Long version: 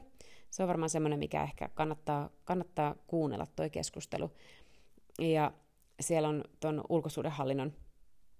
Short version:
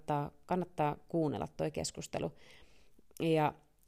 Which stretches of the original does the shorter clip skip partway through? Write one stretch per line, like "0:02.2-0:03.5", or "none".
none